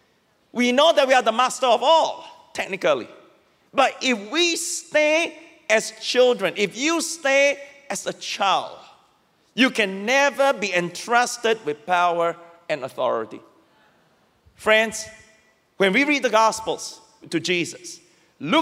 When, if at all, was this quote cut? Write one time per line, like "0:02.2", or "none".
0:17.2